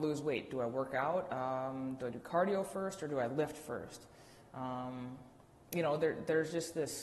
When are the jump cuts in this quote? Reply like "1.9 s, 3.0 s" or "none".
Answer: none